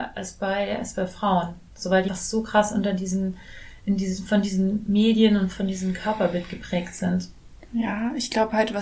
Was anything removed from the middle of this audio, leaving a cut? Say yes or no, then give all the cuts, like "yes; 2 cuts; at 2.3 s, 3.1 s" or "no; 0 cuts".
yes; 1 cut; at 2.1 s